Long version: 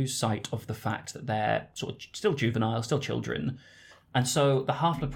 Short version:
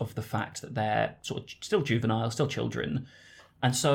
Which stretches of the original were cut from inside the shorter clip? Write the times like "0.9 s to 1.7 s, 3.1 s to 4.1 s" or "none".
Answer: none

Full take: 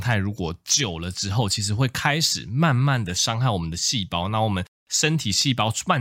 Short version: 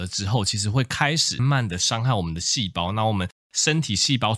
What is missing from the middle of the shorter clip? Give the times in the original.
2.4 s to 2.8 s

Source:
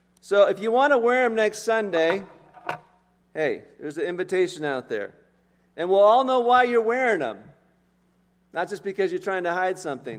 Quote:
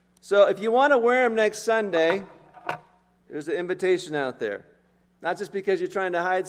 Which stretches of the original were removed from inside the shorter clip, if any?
3.3 s to 3.8 s, 5.5 s to 8.3 s

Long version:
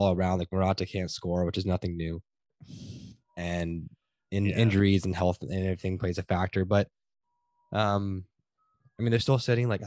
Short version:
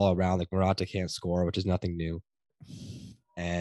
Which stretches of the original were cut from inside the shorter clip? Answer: none

